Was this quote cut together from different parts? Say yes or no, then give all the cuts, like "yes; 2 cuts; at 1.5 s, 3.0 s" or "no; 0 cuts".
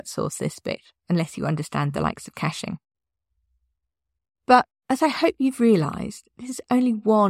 no; 0 cuts